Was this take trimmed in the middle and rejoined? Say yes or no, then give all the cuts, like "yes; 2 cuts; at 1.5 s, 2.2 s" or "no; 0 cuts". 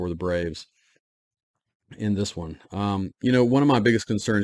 no; 0 cuts